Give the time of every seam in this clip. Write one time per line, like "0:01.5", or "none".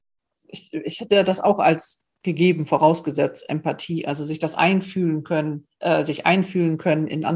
none